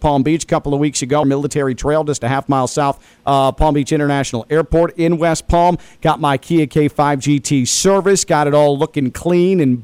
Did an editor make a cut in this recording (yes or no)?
yes